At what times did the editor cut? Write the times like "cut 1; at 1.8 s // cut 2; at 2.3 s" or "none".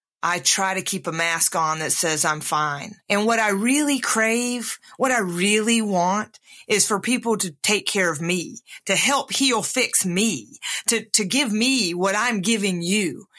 cut 1; at 3.0 s